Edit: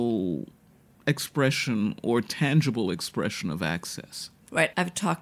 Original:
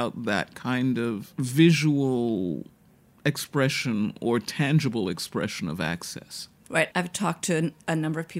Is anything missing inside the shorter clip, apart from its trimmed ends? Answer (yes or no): no